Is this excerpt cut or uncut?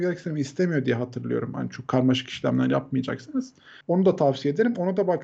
cut